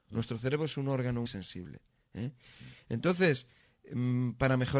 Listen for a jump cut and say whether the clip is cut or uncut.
cut